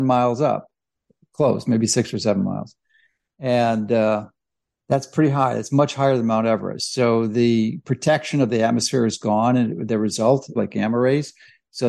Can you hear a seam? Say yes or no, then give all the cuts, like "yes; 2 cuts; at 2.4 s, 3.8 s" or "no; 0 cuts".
yes; 1 cut; at 10.6 s